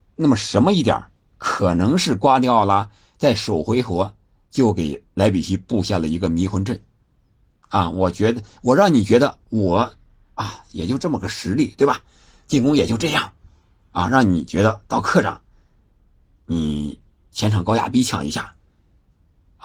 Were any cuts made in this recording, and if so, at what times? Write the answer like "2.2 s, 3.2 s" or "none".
none